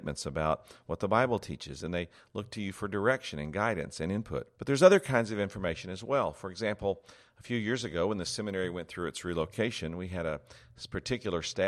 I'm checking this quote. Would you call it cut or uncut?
cut